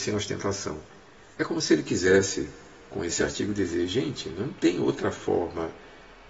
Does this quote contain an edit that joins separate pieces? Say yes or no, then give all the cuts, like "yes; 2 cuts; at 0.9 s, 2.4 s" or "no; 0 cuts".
no; 0 cuts